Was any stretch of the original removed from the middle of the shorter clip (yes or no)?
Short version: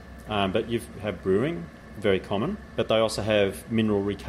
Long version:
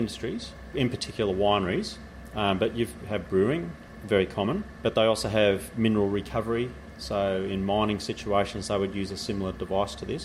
no